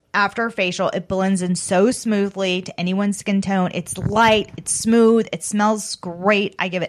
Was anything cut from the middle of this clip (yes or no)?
no